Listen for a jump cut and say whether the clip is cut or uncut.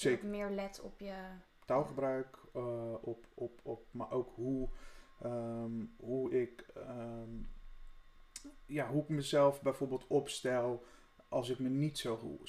uncut